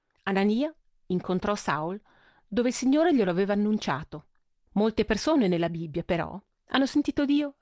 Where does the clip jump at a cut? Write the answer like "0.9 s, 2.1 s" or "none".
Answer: 4.7 s